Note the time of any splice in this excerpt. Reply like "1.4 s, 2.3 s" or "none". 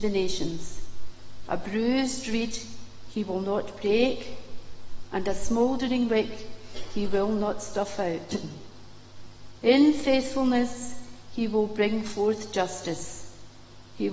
1.5 s

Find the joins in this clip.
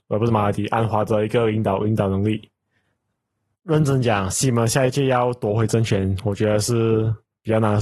none

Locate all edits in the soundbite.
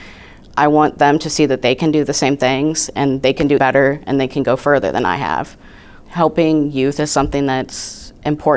3.6 s

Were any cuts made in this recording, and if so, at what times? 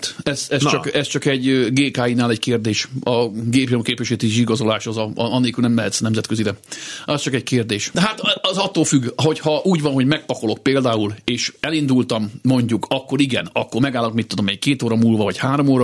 7.9 s

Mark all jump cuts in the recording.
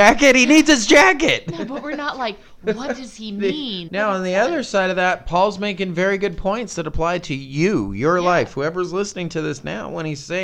3.9 s

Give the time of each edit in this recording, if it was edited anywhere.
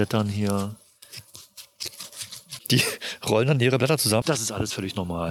2.6 s, 4.2 s

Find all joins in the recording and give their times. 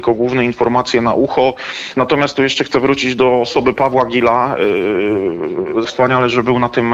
1.9 s, 5.8 s

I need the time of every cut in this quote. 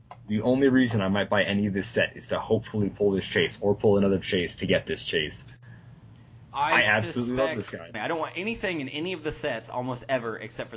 7.9 s

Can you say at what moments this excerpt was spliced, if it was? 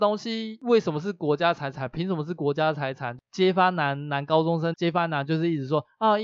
3.2 s, 4.7 s

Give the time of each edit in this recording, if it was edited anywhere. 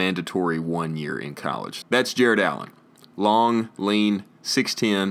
1.8 s

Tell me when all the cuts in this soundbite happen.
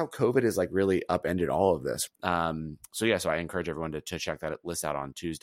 2.1 s

